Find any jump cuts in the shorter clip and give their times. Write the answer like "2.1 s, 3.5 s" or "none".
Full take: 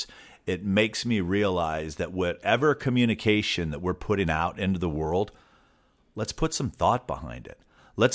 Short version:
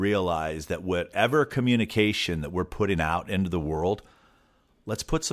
none